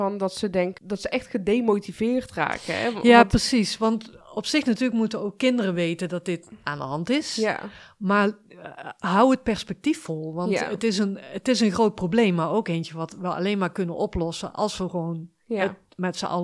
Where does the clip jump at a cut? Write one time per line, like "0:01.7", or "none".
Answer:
none